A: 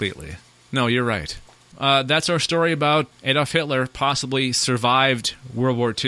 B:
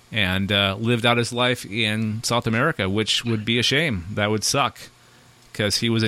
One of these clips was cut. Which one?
A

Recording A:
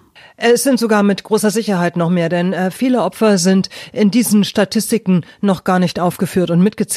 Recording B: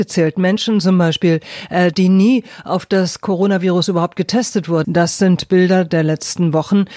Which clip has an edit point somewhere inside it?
B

